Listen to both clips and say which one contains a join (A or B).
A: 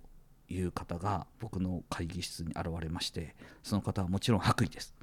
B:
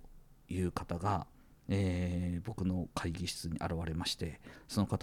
A